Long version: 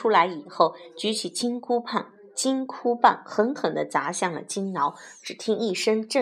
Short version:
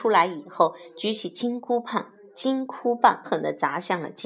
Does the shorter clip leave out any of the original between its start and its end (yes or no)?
yes